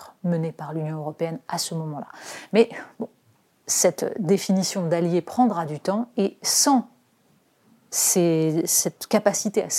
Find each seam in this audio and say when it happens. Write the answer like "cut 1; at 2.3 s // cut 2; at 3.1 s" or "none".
none